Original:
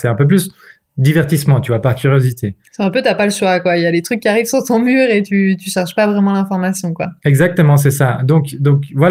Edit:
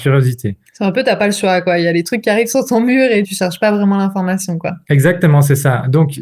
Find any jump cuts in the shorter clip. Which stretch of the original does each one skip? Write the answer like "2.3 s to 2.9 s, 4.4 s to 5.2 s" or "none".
5.2 s to 5.6 s